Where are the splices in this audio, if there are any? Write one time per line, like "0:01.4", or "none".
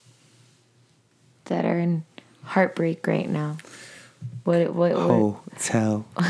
0:04.5

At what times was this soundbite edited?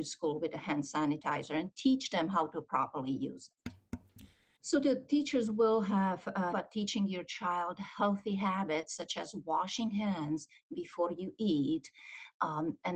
0:04.6
0:06.5

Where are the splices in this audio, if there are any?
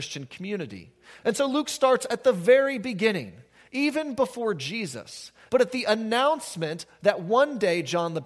0:01.2
0:05.5

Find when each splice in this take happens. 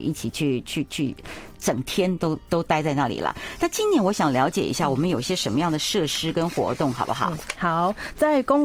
none

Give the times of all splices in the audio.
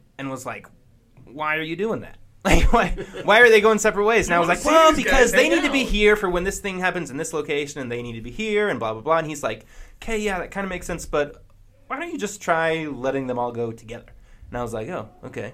none

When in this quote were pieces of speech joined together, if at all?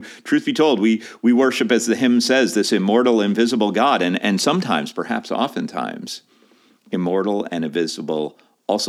none

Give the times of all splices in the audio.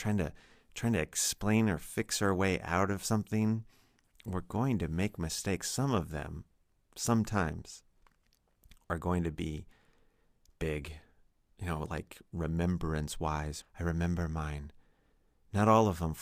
0:13.6

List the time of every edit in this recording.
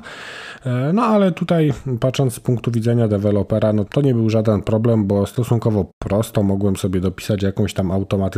0:03.9

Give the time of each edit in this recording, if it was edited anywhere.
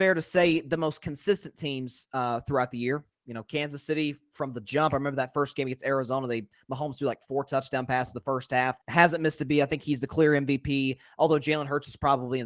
0:08.8

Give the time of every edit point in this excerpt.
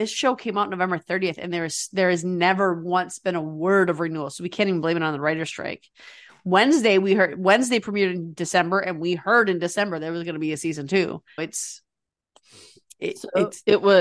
0:11.4
0:13.0

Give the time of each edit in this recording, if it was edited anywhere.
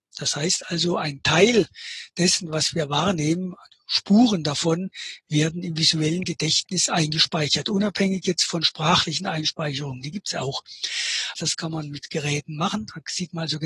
0:11.3

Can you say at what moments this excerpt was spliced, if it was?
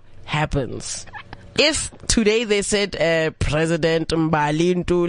none

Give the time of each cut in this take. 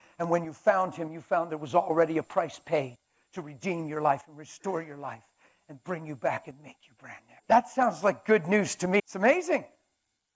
0:07.4
0:09.0

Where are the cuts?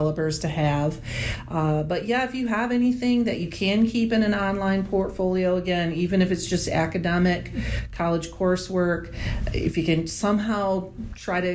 none

